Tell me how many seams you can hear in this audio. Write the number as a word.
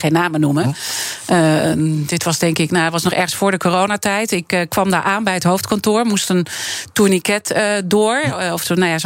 zero